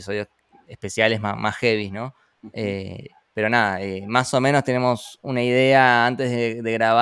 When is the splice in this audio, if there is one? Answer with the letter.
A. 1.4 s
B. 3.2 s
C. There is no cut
A